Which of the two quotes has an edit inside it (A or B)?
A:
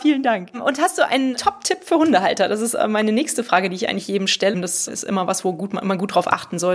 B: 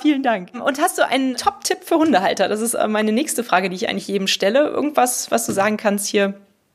A